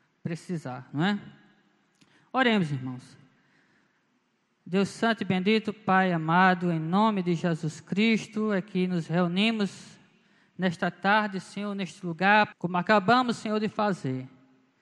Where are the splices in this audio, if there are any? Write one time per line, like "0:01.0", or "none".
0:12.5